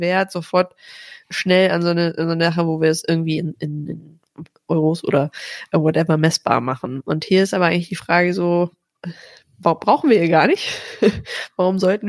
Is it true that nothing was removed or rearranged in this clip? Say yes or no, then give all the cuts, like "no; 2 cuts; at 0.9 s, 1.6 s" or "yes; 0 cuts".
yes; 0 cuts